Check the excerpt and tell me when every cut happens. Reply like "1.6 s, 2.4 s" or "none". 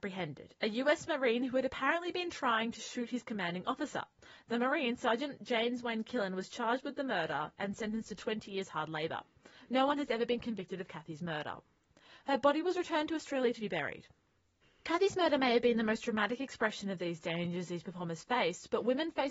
9.6 s